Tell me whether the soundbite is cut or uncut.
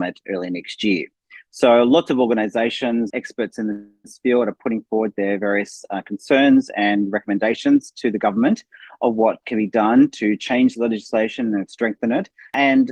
cut